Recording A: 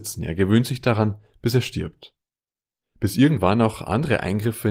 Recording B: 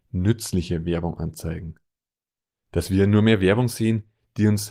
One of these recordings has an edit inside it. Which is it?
A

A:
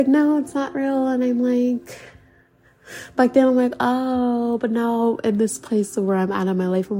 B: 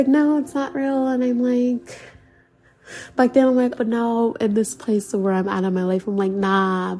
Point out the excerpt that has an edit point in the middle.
B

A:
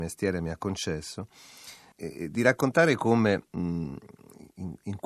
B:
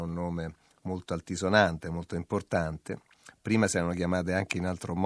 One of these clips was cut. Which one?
A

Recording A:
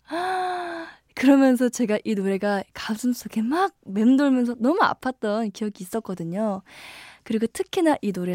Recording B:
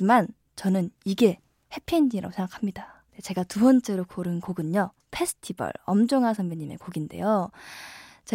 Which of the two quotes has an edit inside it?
B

